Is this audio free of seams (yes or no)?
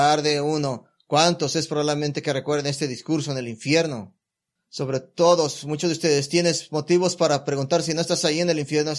no